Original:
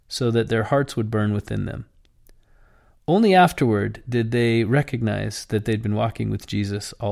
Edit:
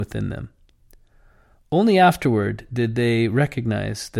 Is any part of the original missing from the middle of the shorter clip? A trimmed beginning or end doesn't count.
no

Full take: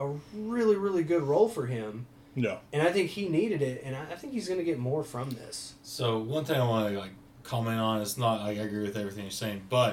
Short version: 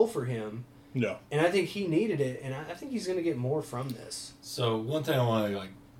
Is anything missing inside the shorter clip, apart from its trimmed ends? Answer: no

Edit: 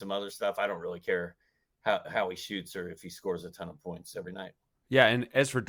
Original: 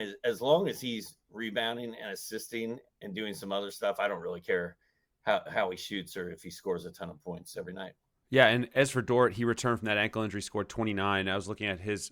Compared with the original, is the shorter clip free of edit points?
yes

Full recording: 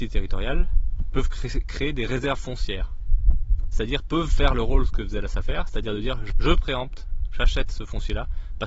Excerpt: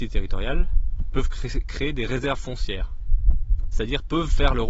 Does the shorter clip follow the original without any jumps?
yes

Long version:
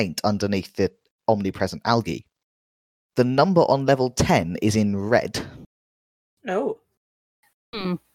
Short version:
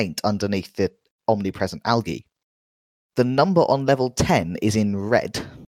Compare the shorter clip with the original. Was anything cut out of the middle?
no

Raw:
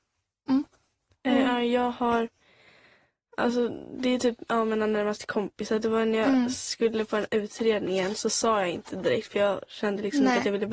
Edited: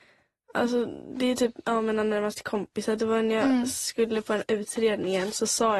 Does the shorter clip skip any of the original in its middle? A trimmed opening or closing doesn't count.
no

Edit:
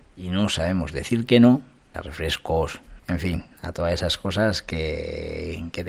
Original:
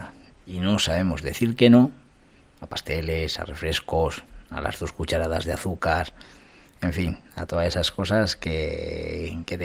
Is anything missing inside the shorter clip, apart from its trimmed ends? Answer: yes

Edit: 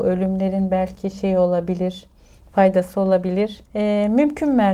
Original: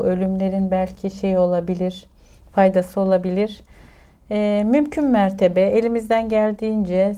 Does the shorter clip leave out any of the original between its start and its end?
yes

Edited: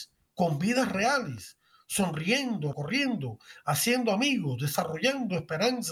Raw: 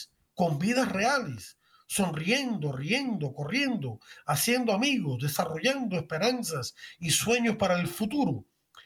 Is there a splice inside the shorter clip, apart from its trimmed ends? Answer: yes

